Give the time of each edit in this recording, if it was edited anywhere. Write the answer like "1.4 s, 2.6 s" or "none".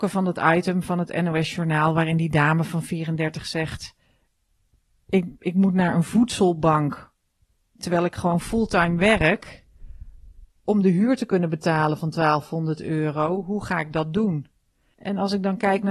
none